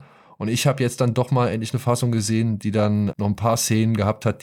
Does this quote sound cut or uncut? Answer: cut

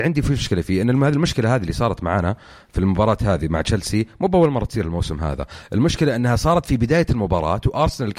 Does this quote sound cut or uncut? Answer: uncut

